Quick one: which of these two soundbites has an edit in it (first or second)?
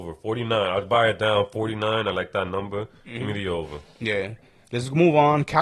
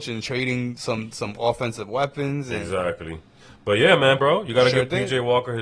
second